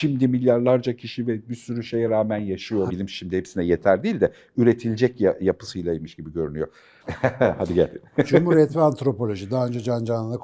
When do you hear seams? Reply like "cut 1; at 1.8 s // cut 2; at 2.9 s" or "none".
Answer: cut 1; at 2.9 s // cut 2; at 7.0 s